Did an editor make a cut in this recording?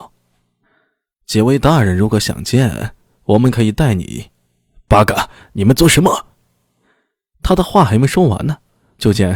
no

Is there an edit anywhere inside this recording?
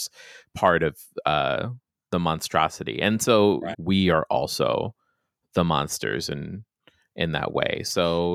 yes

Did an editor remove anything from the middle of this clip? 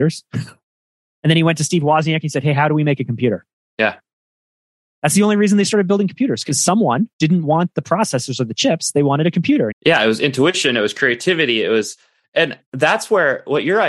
yes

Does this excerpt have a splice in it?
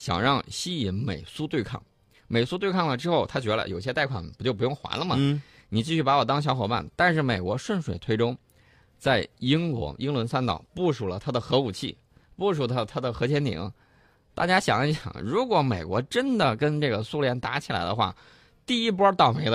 no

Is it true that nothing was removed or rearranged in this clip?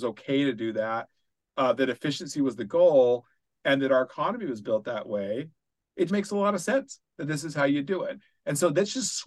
no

